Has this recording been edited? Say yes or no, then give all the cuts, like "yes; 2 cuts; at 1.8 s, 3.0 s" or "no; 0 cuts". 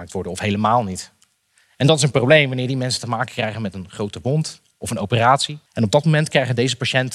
yes; 1 cut; at 5.7 s